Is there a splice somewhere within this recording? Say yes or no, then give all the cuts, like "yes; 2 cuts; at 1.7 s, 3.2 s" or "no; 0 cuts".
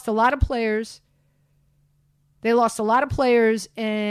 no; 0 cuts